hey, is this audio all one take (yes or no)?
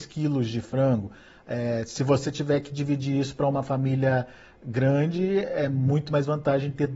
yes